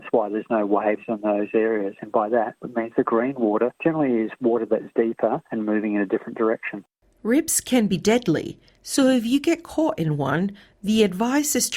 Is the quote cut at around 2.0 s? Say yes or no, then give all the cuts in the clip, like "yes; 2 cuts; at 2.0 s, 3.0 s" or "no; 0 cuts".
yes; 1 cut; at 2.0 s